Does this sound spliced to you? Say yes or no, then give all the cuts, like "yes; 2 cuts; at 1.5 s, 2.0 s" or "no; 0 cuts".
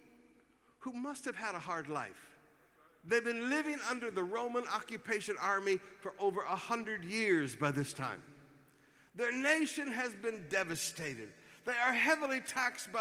no; 0 cuts